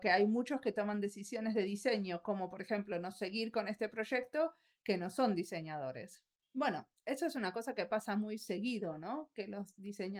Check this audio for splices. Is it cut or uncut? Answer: cut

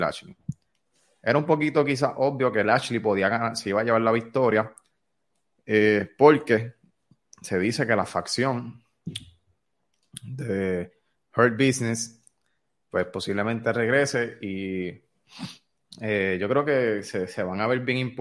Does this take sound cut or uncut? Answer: uncut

